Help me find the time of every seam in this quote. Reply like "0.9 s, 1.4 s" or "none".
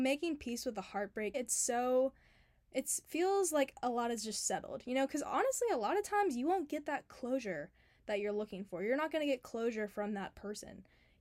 1.3 s